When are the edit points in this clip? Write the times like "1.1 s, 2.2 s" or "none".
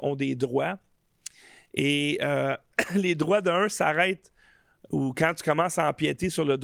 none